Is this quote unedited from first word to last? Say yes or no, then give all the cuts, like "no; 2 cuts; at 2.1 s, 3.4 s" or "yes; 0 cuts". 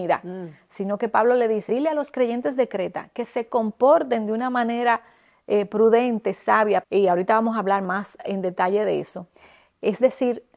no; 2 cuts; at 1.7 s, 6.8 s